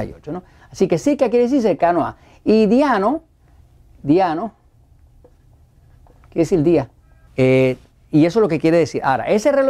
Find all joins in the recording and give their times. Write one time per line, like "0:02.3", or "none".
0:07.3